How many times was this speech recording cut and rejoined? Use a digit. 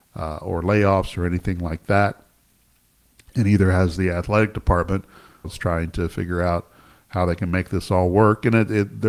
1